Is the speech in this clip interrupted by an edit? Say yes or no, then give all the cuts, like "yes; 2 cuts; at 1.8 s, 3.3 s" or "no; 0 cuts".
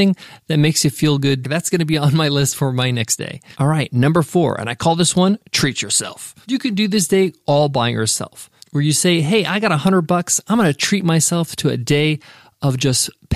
yes; 1 cut; at 1.4 s